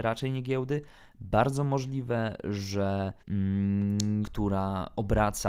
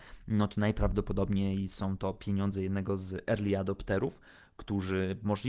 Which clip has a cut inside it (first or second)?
first